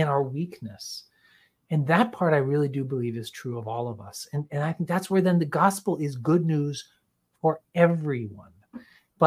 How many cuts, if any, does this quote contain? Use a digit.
0